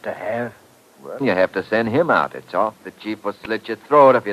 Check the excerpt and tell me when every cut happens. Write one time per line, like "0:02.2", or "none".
0:01.2
0:02.8